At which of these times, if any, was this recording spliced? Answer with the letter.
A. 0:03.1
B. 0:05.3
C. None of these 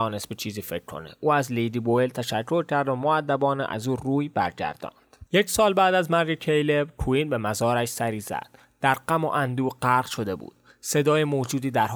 B